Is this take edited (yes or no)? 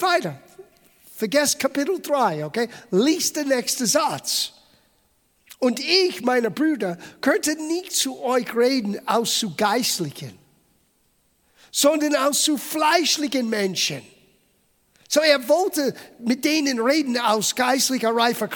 no